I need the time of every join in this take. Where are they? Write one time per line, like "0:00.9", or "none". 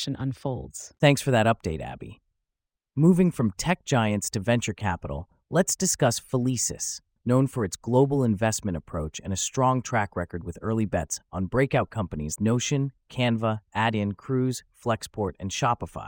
0:07.2
0:12.4